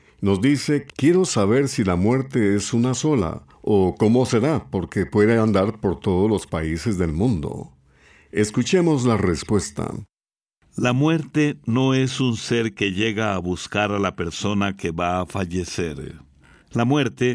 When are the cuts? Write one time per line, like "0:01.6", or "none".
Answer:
none